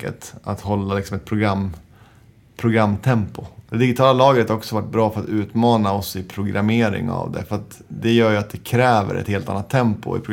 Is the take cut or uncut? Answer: cut